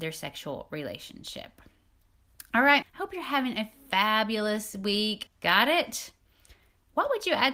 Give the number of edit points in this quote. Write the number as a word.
two